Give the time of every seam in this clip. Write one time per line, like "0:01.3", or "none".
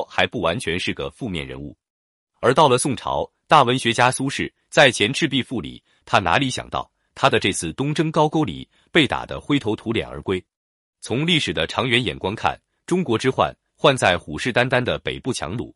0:02.2
0:06.0